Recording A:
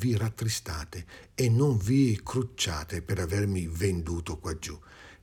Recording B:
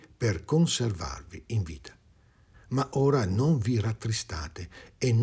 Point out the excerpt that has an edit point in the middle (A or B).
B